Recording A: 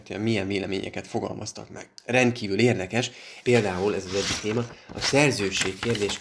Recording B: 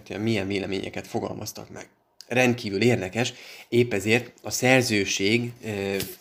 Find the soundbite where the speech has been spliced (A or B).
A